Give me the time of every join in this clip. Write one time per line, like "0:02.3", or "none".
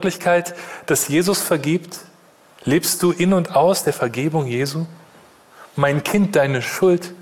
none